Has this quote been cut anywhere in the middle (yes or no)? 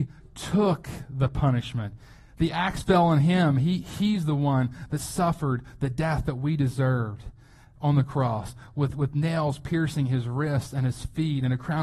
no